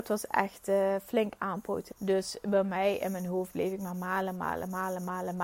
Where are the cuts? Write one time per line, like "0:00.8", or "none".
0:01.9